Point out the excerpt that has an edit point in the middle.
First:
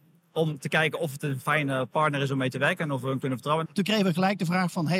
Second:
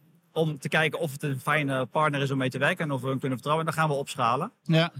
first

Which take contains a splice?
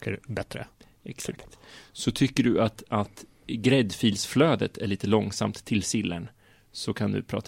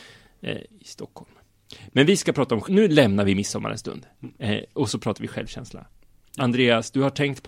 second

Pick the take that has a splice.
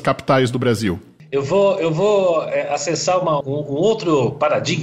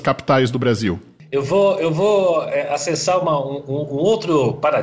first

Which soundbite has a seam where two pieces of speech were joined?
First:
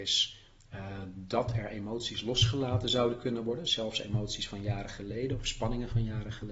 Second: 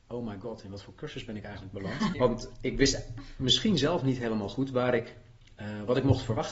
second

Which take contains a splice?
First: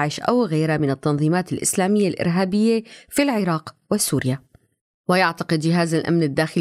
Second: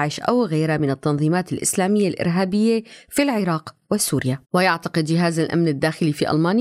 second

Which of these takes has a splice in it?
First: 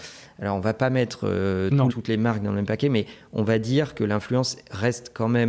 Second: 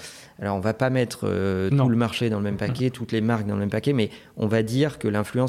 first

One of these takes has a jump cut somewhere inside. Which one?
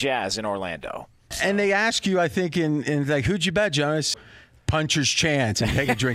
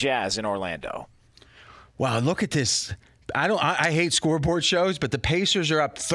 first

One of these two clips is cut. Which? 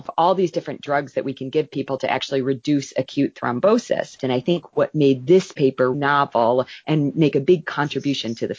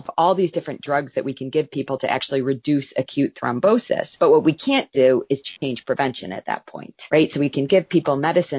first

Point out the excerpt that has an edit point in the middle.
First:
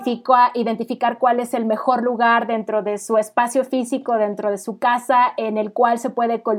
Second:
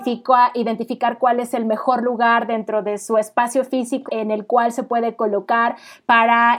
second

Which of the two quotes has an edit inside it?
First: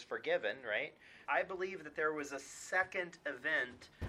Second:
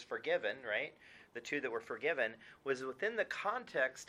first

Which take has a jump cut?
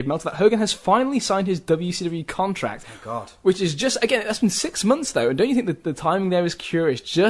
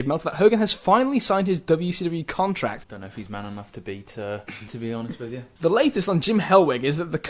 second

